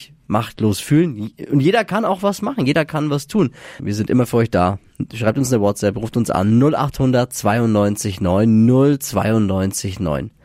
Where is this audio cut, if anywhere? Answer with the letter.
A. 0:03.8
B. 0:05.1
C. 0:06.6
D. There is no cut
A